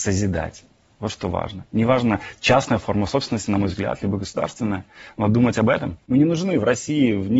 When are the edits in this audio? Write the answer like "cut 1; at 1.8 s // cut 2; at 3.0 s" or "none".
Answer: cut 1; at 6.1 s